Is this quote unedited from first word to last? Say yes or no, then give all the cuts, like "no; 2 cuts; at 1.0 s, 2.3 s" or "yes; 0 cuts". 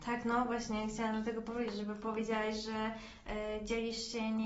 yes; 0 cuts